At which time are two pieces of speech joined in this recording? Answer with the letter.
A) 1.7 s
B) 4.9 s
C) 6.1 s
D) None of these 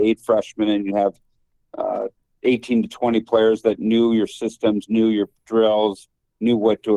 D